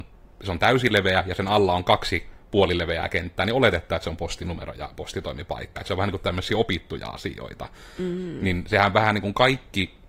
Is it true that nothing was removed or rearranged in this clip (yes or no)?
yes